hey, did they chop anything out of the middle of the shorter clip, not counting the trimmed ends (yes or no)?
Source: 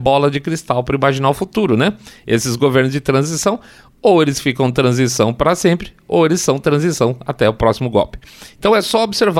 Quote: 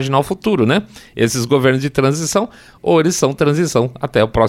yes